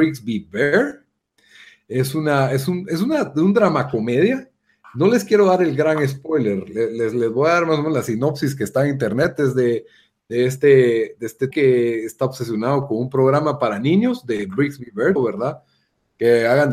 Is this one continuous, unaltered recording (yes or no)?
no